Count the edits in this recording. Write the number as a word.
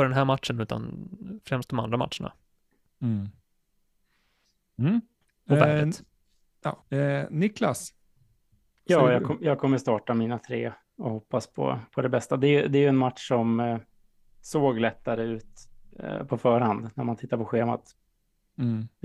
one